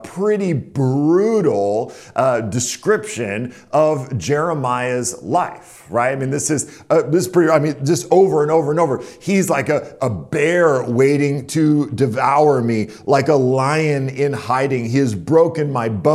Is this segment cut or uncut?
uncut